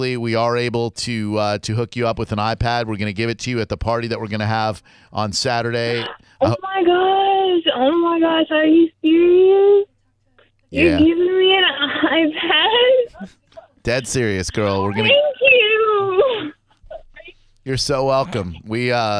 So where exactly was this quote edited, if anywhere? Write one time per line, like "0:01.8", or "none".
none

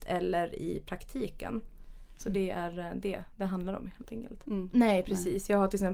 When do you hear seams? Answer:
0:04.7

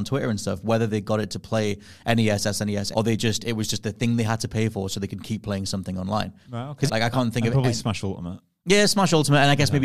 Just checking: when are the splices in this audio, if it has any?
0:02.9
0:06.9

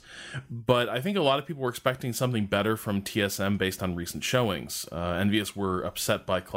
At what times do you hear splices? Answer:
none

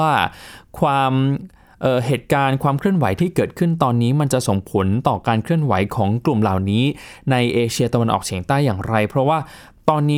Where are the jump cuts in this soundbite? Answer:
none

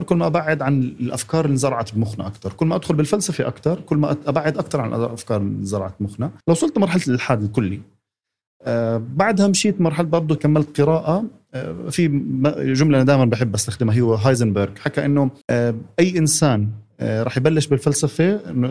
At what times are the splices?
0:06.4
0:10.4
0:15.4

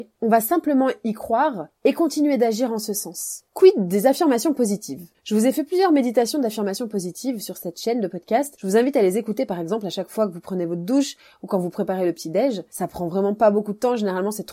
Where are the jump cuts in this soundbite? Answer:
0:03.5

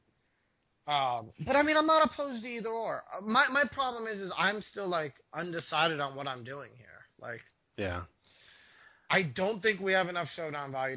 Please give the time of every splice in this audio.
none

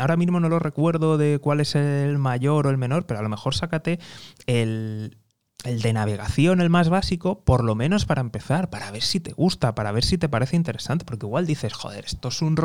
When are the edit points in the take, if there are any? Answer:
none

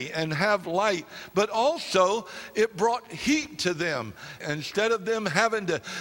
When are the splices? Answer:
0:04.4

